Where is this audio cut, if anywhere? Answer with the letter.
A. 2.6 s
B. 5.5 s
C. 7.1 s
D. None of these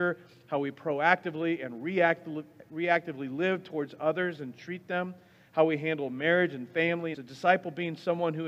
C